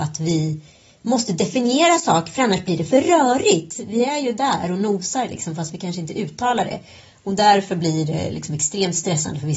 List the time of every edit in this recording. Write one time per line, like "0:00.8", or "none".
none